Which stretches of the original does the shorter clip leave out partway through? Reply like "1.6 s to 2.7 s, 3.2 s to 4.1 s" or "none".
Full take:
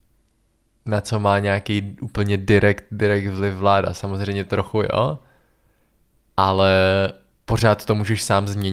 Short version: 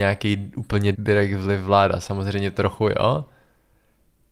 2.4 s to 2.9 s